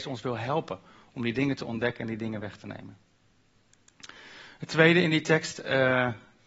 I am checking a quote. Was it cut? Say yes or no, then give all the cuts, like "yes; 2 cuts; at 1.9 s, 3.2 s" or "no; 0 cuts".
no; 0 cuts